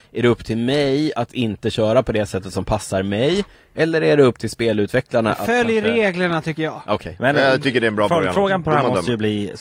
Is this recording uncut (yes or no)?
yes